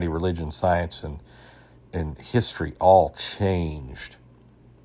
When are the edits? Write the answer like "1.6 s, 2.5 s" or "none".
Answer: none